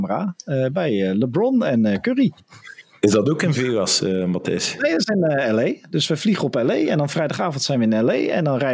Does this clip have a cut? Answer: no; 0 cuts

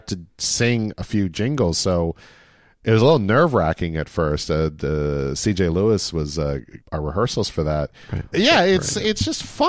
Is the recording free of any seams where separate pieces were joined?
no; 2 cuts; at 6.8 s, 8.3 s

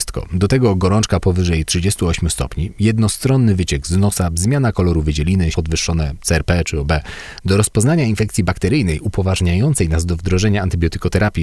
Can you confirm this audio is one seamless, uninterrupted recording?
no; 1 cut; at 5.5 s

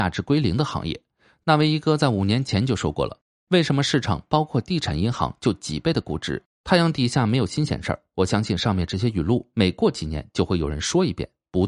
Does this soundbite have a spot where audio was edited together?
yes; 1 cut; at 6.5 s

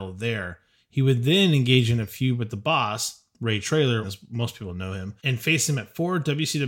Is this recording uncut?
no; 2 cuts; at 4.0 s, 5.2 s

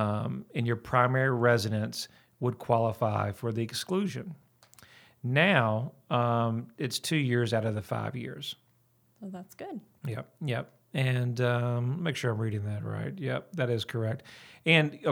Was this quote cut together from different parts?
no; 0 cuts

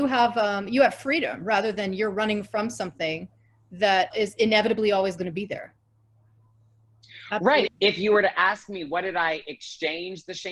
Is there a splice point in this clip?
yes; 2 cuts; at 4.1 s, 7.7 s

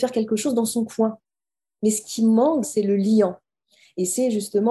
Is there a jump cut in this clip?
yes; 1 cut; at 2.6 s

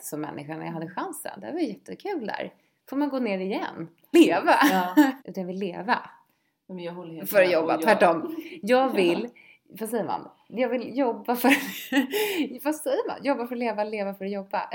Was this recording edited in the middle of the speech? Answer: yes; 2 cuts; at 4.1 s, 5.2 s

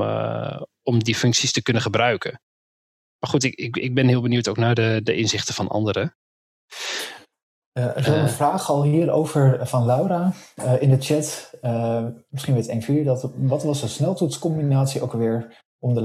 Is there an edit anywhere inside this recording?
no; 0 cuts

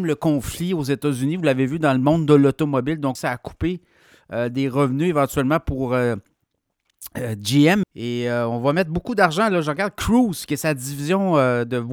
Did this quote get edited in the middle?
yes; 2 cuts; at 3.2 s, 7.8 s

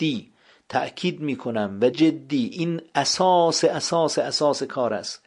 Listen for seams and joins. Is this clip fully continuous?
no; 1 cut; at 1.9 s

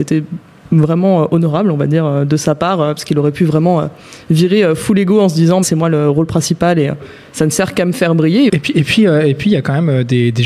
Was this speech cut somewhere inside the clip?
yes; 2 cuts; at 5.6 s, 8.5 s

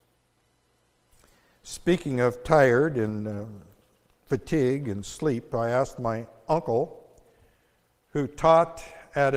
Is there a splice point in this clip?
no; 0 cuts

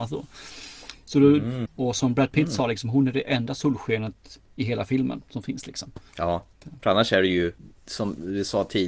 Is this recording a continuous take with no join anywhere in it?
no; 1 cut; at 1.7 s

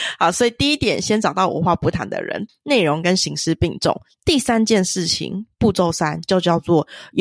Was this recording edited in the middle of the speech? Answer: yes; 1 cut; at 2.5 s

